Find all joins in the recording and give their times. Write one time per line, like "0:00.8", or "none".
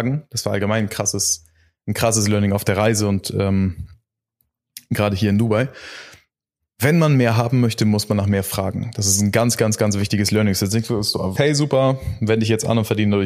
0:11.4

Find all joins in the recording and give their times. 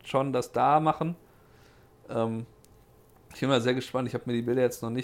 none

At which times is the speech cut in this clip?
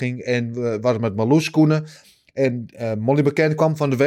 none

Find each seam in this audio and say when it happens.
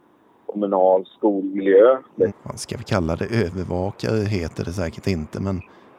0:02.3

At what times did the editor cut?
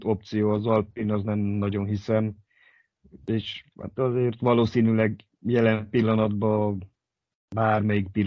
none

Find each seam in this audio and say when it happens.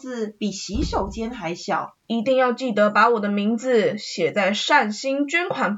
0:02.0

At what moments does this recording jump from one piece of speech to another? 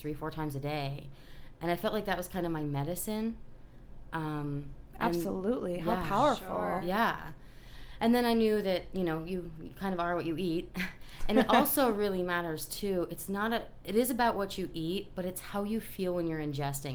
none

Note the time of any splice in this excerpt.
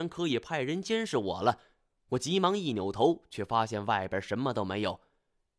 none

